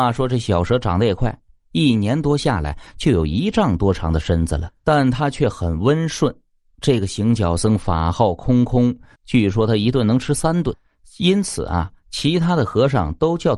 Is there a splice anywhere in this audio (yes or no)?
yes